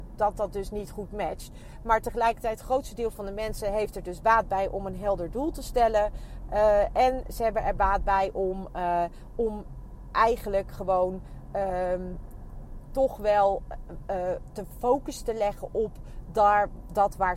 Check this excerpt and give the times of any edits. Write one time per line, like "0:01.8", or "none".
none